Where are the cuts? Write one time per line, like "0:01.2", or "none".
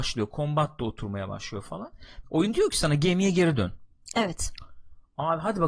0:02.2